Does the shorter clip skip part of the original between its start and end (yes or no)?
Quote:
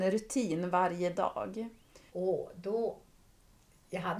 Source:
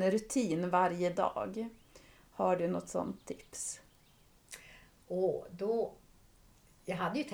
yes